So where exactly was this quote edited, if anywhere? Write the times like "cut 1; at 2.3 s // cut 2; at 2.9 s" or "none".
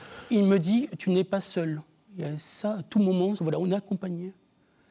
cut 1; at 2.1 s // cut 2; at 3.4 s